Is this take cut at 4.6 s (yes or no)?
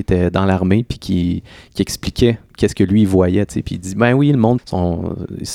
yes